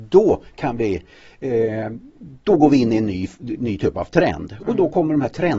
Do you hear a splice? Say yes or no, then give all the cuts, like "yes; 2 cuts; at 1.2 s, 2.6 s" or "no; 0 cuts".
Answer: no; 0 cuts